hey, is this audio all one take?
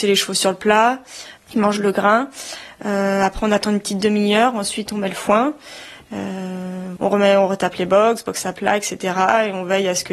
no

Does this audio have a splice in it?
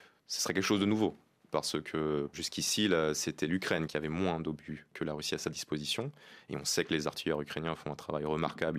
no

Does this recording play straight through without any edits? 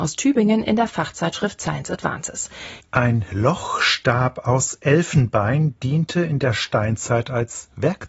no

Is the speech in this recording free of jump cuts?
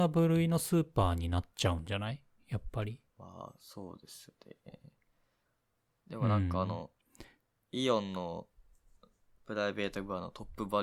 no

